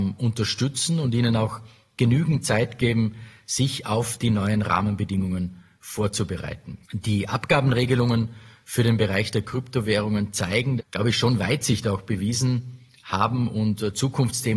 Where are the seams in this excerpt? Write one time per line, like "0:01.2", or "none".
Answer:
0:06.8
0:10.8